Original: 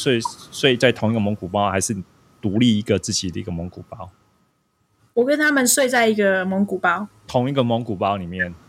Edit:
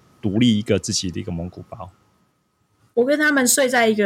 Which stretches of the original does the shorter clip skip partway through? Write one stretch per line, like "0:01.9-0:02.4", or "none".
none